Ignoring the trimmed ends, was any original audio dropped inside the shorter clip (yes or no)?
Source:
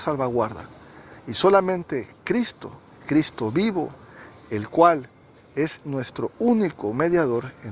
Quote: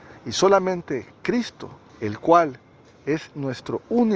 yes